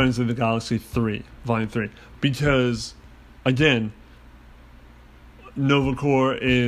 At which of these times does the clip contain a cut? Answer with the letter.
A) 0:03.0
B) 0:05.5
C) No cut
C